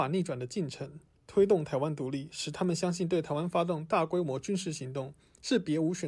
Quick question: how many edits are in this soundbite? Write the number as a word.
zero